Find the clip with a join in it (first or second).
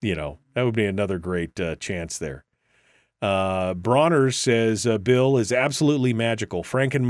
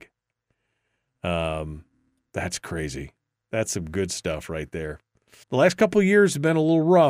second